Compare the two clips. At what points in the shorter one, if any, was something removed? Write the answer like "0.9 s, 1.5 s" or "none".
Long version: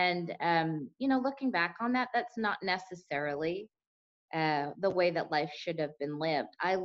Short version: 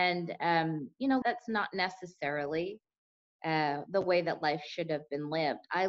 1.2 s